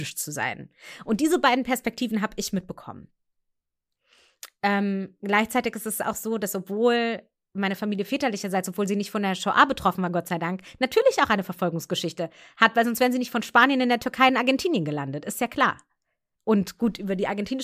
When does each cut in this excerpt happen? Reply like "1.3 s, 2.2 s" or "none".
none